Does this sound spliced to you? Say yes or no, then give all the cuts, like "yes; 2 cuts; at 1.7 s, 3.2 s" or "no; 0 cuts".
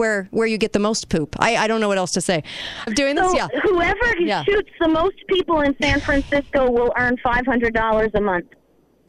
yes; 1 cut; at 2.9 s